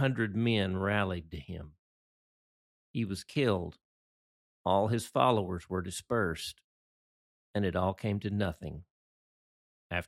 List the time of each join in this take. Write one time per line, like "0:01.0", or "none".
none